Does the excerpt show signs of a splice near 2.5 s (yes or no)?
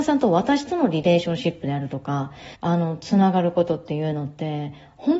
yes